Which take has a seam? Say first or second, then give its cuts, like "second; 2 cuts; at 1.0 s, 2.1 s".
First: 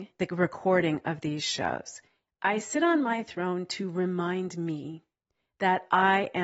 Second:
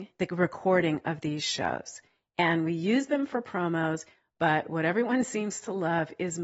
first; 1 cut; at 2.3 s